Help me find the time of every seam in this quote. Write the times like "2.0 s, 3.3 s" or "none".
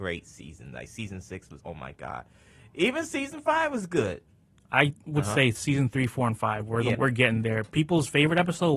1.6 s, 6.9 s